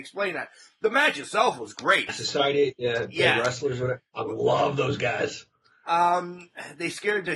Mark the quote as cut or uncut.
cut